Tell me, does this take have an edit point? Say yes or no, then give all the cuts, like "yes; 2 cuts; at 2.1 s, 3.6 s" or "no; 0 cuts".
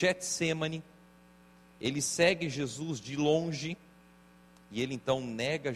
no; 0 cuts